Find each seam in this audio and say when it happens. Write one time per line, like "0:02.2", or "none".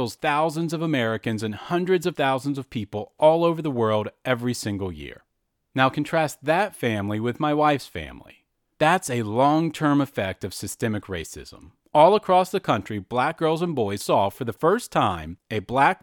0:08.7
0:11.8